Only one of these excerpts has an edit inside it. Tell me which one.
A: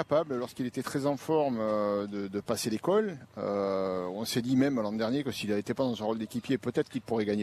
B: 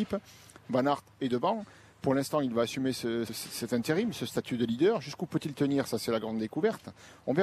B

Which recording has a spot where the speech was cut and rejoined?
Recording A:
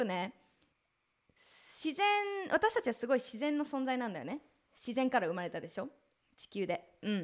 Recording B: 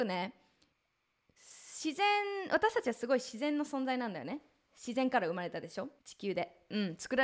B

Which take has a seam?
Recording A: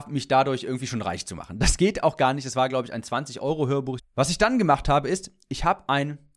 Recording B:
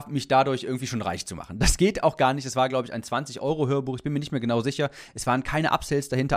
A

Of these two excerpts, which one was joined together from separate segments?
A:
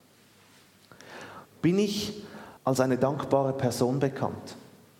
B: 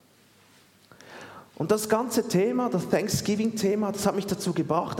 A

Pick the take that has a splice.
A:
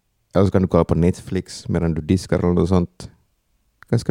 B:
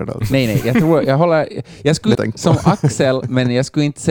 B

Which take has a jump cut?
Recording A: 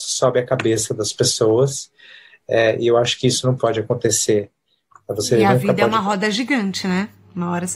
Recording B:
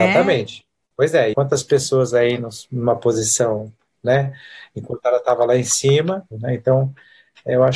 B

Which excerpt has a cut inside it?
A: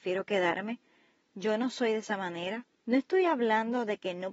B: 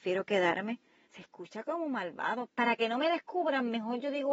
B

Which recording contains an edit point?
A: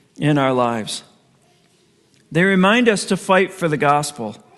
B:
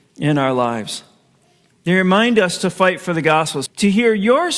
B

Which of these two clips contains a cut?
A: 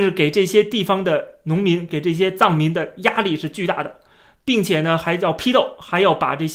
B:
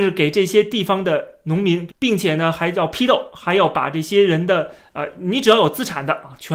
B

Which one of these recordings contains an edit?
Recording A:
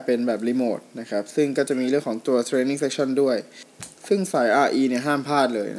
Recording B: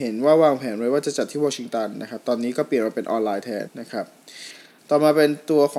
B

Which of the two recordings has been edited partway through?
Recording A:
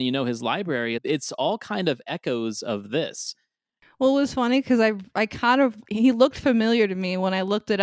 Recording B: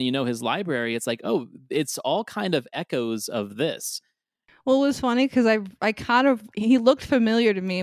A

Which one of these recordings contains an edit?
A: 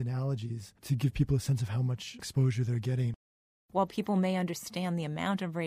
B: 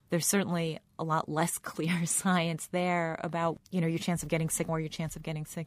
B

